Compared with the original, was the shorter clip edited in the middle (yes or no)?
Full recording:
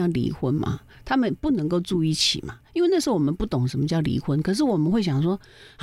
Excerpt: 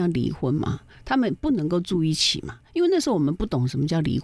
no